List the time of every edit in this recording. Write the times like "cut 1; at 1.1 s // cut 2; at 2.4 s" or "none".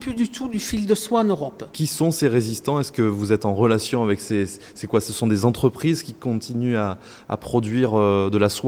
cut 1; at 1.7 s